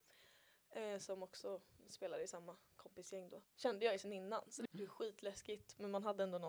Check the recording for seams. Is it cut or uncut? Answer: cut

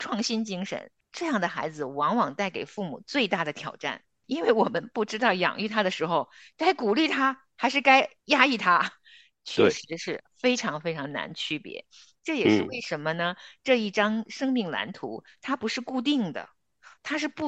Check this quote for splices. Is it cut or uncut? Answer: uncut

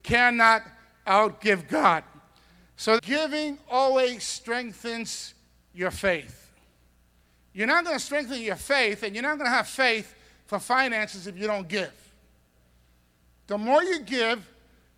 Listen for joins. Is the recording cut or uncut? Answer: cut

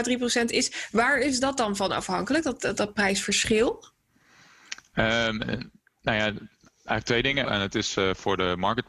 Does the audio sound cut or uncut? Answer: cut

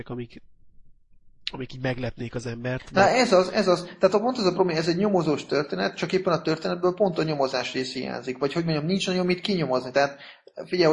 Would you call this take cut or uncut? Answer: uncut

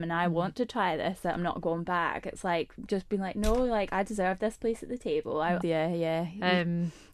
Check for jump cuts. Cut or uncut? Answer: cut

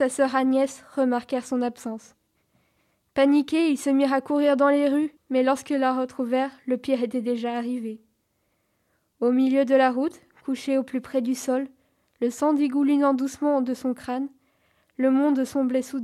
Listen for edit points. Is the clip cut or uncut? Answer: cut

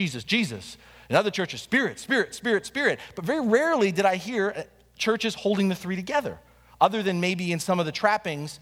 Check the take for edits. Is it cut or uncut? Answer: uncut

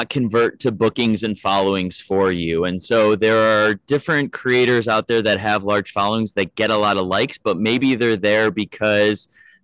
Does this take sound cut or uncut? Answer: uncut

